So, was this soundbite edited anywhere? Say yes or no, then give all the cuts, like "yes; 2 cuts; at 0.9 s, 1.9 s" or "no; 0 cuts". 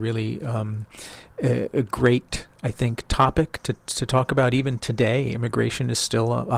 no; 0 cuts